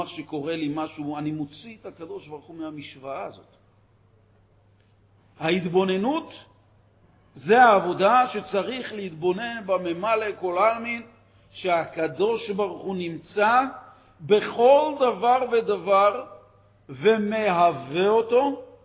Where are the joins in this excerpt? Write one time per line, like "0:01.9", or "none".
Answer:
none